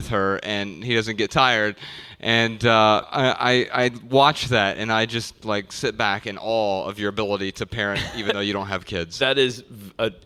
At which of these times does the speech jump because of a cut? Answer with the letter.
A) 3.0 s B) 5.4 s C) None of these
A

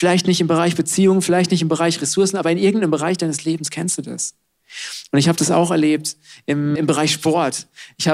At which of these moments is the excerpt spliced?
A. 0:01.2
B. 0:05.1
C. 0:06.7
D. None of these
C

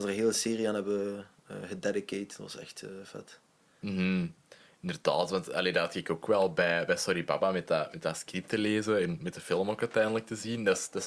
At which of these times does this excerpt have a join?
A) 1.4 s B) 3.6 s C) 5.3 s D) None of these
D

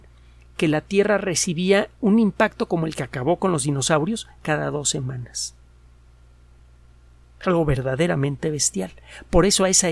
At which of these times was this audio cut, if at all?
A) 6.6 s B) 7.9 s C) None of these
C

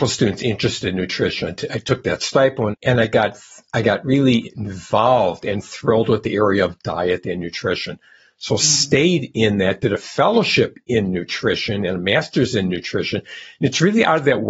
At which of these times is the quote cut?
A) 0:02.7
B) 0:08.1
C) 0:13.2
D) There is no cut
A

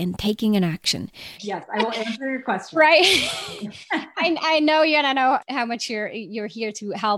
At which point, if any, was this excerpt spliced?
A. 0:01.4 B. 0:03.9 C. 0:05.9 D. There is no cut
A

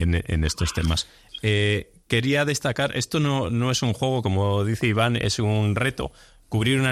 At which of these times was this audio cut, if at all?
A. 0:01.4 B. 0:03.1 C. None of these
C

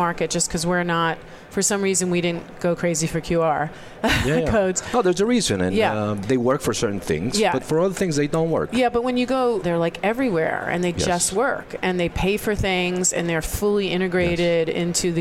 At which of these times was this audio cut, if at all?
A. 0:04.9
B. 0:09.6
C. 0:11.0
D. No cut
B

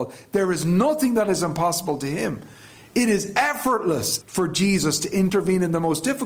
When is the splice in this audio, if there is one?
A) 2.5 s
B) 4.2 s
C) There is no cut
B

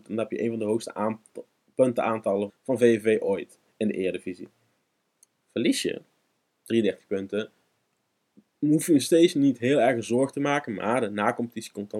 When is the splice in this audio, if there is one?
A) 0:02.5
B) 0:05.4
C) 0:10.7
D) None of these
A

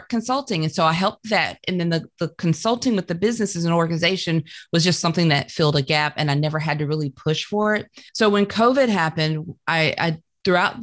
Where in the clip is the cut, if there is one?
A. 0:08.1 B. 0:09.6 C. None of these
A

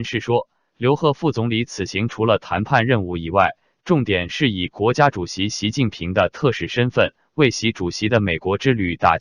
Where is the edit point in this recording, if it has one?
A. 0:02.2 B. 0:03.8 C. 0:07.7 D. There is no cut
D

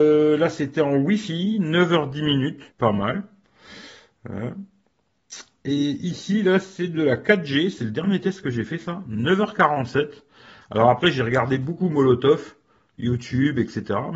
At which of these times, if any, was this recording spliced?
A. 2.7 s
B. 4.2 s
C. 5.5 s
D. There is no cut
A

